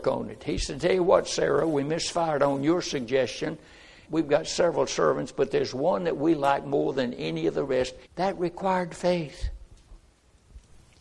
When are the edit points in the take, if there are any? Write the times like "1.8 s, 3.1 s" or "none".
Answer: 4.1 s, 8.1 s

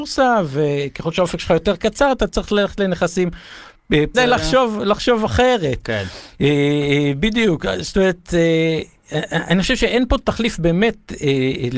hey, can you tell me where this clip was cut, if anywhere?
4.1 s

